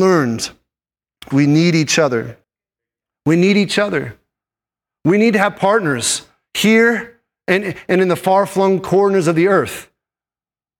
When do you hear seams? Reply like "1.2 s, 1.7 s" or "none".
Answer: 1.3 s